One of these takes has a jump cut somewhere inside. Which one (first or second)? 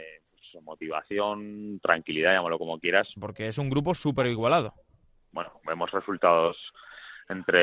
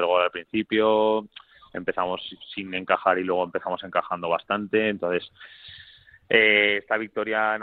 first